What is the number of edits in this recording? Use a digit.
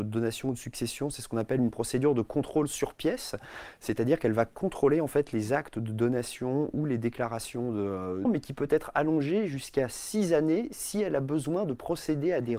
1